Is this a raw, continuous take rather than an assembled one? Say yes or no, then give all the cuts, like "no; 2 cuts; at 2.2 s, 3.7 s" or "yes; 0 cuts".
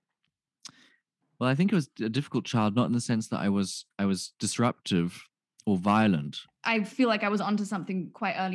no; 1 cut; at 6.5 s